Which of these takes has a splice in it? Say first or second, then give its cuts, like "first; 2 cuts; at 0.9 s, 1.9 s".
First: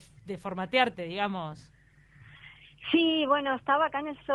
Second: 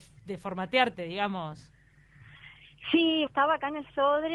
second; 1 cut; at 3.3 s